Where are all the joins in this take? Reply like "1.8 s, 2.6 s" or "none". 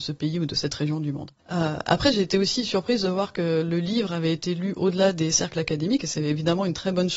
1.4 s